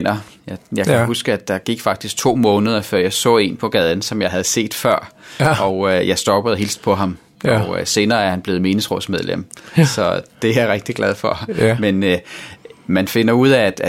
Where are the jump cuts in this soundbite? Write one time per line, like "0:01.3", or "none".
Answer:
none